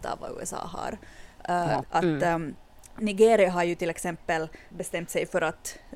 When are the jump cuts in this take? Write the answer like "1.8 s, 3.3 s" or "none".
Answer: 1.8 s, 4.7 s